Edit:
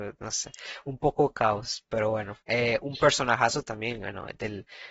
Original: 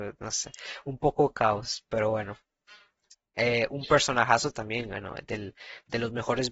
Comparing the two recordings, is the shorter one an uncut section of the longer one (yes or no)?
no